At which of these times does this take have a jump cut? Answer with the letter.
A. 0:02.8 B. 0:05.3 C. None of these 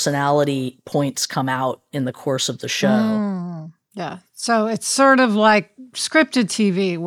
C